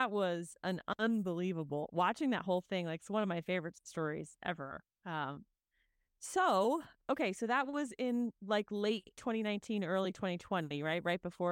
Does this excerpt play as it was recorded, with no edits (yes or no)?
yes